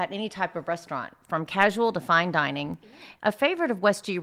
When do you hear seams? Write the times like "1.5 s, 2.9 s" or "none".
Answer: 3.2 s

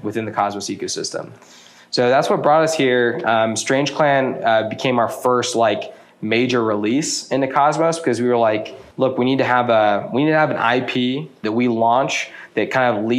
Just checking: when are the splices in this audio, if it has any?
8.9 s, 11.4 s

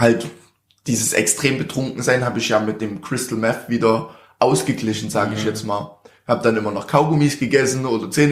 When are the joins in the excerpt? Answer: none

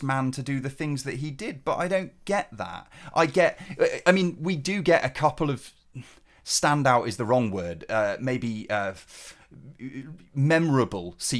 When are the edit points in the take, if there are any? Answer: none

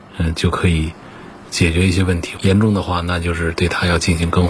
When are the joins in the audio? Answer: none

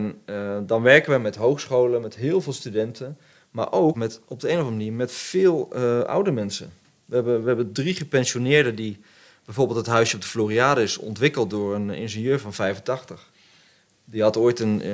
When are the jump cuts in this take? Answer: 3.9 s

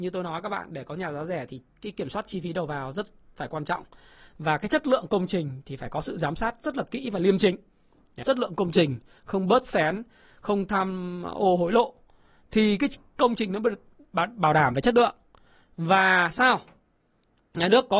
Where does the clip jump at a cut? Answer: 8.2 s

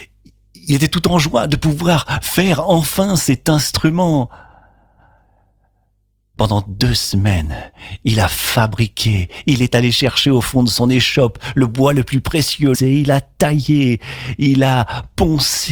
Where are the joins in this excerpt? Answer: 12.7 s

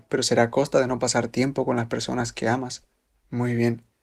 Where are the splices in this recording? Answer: 3.1 s

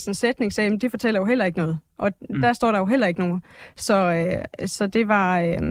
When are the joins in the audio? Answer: none

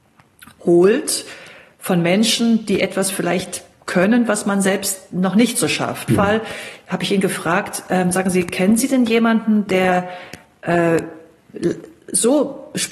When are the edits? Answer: 6.1 s

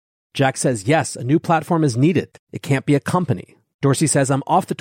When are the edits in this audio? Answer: 3.7 s

